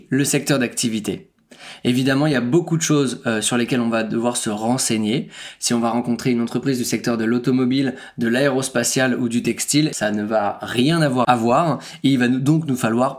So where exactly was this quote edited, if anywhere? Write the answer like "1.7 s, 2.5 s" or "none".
9.9 s, 11.2 s